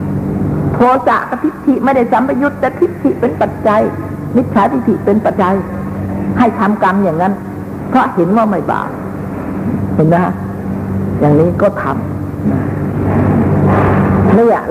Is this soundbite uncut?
no; 1 cut; at 5.3 s

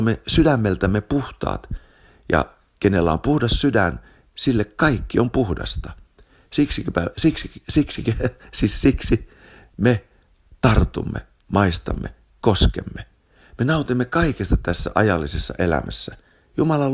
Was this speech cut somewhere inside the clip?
no; 0 cuts

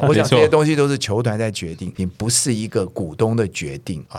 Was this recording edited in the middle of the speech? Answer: yes; 1 cut; at 2.0 s

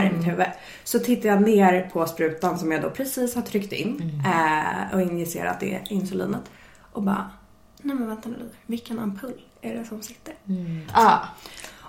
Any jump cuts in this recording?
yes; 1 cut; at 10.9 s

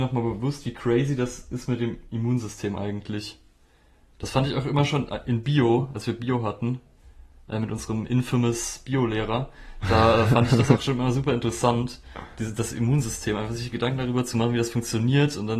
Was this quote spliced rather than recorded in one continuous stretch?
no; 0 cuts

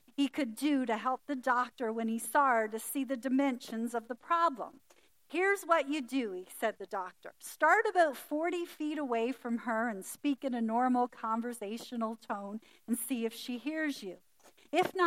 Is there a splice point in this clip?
no; 0 cuts

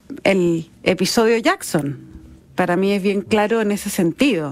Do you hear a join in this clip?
no; 0 cuts

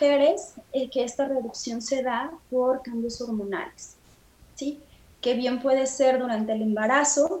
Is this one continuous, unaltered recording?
yes; 0 cuts

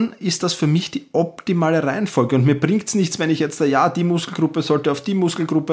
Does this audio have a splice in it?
no; 0 cuts

